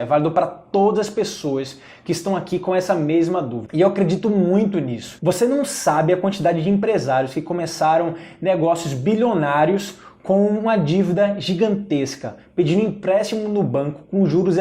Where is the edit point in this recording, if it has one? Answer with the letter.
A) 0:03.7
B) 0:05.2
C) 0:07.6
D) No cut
A